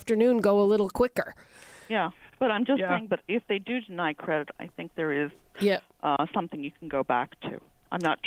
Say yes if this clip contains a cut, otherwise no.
no